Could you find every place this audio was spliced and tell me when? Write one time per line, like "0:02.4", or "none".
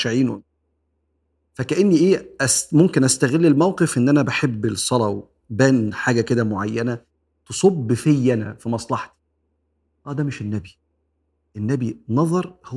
none